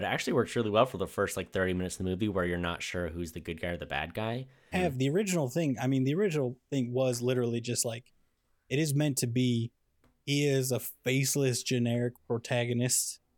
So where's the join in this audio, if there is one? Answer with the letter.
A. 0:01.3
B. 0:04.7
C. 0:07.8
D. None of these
B